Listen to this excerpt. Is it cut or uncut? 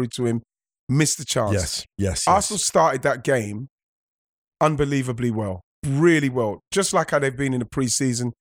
uncut